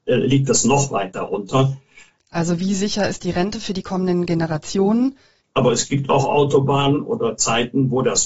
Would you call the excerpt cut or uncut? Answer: cut